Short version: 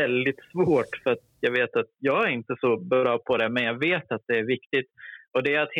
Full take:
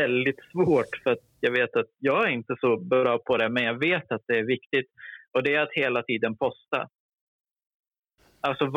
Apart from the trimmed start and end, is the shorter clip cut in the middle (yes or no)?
no